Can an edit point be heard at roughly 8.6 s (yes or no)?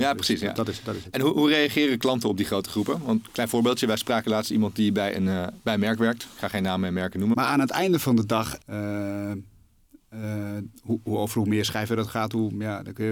yes